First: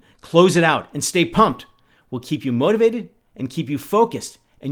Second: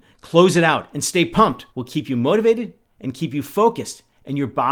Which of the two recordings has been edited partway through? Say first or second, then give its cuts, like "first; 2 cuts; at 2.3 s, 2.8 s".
second; 1 cut; at 1.7 s